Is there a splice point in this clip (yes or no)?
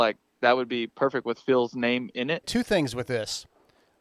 yes